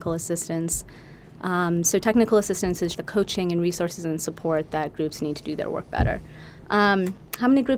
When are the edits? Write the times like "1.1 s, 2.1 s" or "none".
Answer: 2.9 s